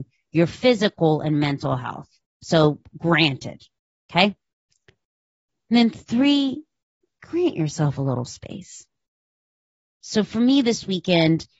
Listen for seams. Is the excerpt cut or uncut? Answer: uncut